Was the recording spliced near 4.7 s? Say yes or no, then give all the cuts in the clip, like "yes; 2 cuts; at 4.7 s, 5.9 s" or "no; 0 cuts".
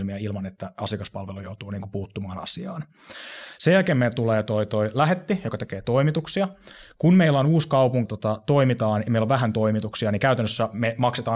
no; 1 cut; at 8.1 s